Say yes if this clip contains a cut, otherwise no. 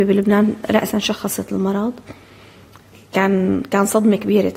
no